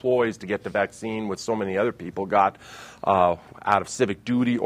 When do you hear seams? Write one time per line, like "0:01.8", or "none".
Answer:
0:03.5